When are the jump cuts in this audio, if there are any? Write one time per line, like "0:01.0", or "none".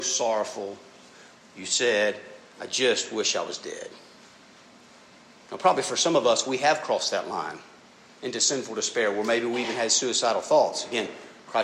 none